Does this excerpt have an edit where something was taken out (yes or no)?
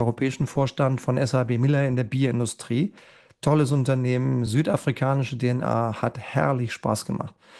no